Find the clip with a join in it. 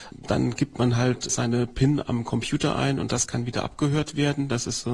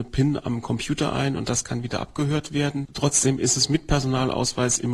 second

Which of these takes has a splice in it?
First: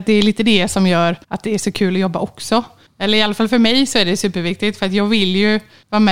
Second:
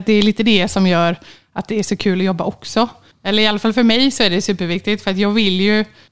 first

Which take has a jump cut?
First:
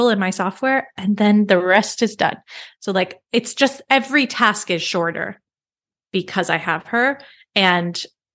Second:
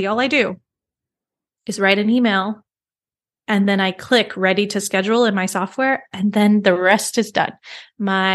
first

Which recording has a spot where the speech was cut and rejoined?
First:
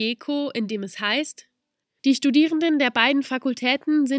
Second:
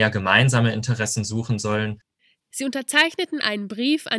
second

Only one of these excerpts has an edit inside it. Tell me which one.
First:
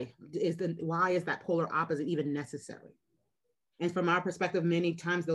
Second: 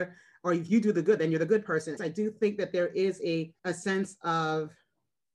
second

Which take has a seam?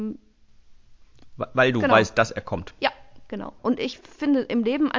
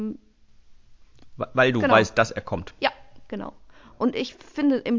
first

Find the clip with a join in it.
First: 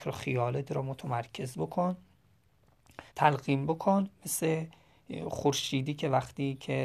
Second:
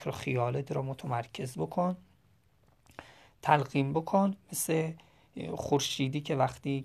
first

